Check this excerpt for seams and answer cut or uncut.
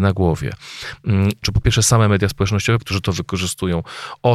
cut